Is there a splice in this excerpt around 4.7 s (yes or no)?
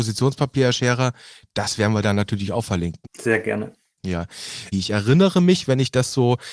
yes